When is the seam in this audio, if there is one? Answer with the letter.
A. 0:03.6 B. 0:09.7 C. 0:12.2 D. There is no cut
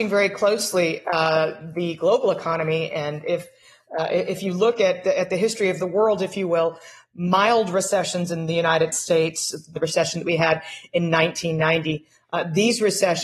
B